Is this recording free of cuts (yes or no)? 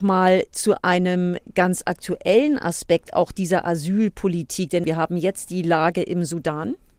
yes